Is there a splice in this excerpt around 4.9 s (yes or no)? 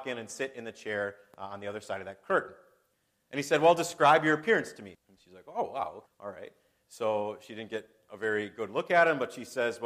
yes